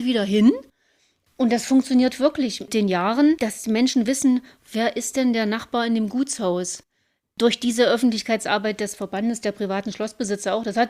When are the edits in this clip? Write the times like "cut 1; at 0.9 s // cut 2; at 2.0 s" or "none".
none